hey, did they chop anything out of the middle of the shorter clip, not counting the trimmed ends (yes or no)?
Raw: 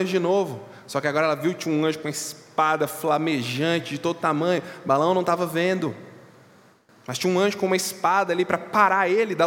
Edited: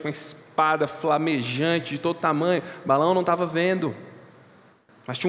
no